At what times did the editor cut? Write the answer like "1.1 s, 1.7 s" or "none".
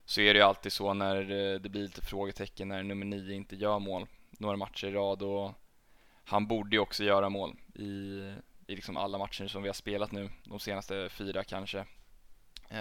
none